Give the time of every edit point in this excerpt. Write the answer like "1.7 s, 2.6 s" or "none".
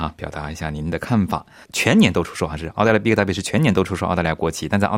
1.6 s